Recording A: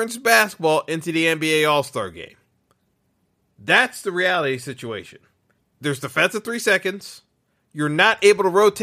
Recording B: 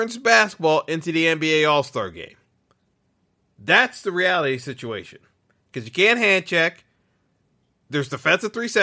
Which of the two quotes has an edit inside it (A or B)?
A